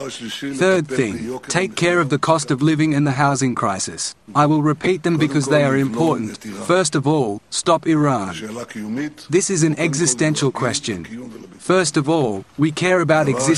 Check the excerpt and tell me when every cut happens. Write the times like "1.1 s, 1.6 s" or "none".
4.3 s